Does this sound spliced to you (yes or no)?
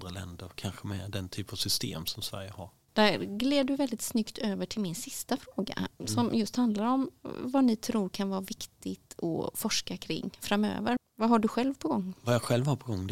yes